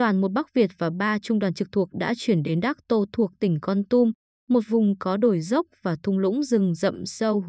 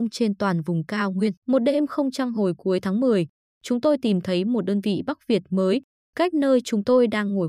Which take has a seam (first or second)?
second